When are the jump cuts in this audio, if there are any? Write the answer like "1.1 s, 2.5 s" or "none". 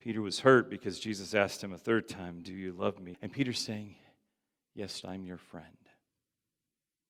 3.1 s, 5.0 s

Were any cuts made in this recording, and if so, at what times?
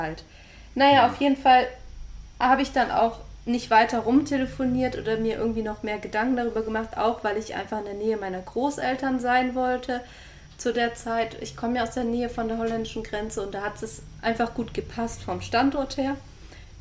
none

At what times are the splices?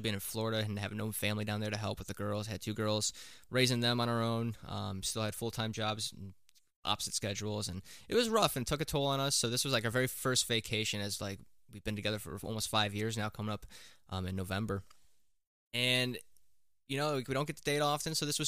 none

